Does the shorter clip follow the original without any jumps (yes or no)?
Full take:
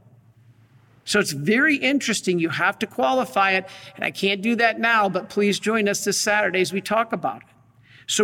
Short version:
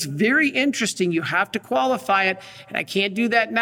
yes